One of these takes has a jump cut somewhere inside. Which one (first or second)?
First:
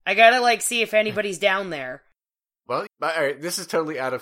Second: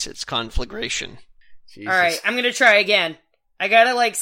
first